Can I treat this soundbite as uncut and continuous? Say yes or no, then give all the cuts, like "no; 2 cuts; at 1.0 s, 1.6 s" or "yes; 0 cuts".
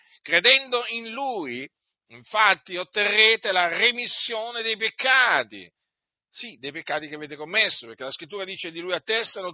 yes; 0 cuts